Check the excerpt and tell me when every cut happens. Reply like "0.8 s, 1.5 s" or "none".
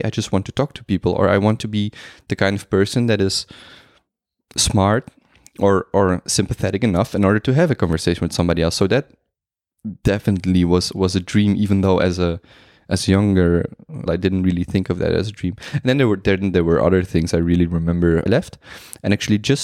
14.1 s, 18.3 s